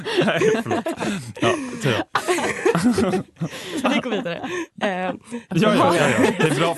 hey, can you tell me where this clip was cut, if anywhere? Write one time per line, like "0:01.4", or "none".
0:03.8
0:05.5